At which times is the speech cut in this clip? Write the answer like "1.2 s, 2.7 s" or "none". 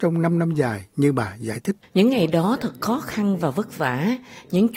1.8 s